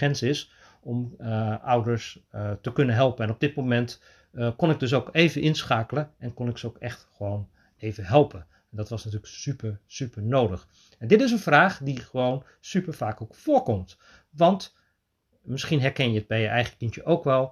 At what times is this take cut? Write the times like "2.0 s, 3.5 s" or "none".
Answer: none